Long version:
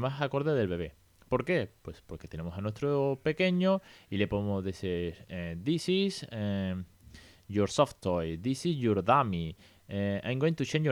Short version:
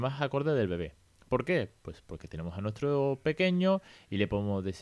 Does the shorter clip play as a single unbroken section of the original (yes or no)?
yes